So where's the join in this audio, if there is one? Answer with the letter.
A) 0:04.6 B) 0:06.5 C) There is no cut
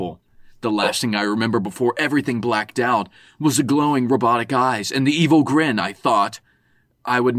C